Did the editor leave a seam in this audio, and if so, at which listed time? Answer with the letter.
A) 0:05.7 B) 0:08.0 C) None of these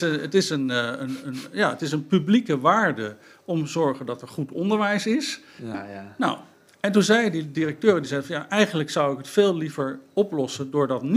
A